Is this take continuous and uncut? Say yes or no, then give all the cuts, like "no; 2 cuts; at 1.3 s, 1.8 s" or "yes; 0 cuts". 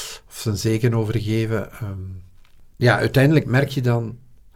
no; 1 cut; at 2.7 s